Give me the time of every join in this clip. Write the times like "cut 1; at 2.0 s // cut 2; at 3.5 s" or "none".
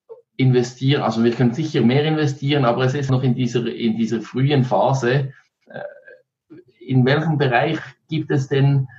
cut 1; at 3.1 s